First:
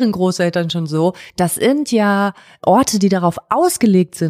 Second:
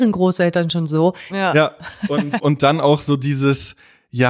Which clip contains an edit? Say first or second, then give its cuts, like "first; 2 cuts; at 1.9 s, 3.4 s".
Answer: second; 1 cut; at 1.3 s